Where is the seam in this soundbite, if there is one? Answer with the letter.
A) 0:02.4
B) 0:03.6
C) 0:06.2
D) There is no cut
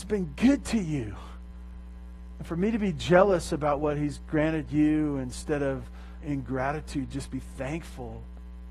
C